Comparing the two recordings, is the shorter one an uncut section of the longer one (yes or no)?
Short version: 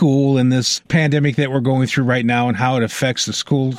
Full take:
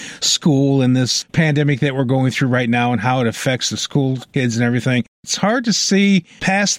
yes